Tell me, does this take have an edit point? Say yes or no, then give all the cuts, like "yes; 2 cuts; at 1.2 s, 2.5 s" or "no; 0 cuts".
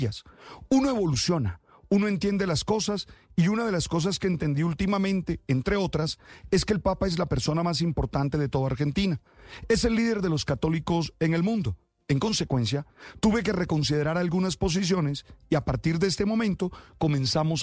no; 0 cuts